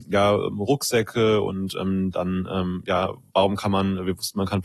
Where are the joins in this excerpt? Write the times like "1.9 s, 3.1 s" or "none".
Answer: none